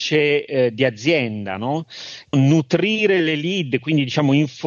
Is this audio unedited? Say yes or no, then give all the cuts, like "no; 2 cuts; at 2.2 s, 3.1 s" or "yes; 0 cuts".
no; 1 cut; at 2.3 s